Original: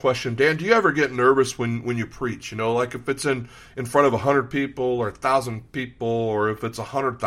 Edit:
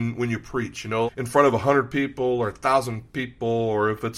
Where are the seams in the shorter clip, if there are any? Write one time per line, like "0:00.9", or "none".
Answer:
0:01.1